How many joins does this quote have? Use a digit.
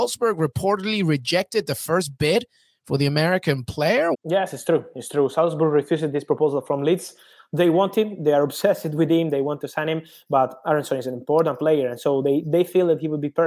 1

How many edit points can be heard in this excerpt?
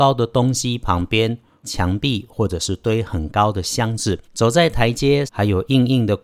3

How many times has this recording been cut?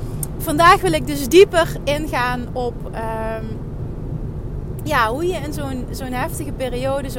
0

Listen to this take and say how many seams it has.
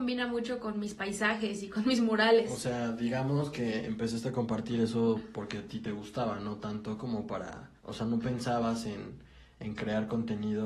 1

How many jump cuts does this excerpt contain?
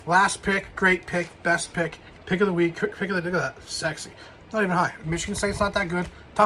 2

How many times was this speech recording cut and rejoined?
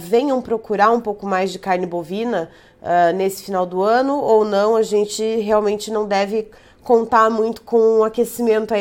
0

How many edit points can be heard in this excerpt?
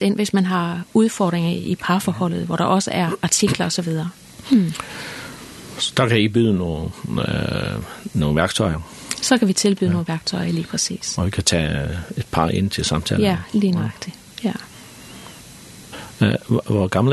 0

